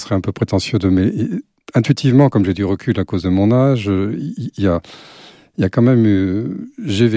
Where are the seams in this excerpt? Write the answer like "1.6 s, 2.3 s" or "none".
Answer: none